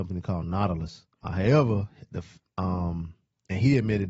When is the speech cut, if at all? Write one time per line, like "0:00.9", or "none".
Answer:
0:01.2
0:02.4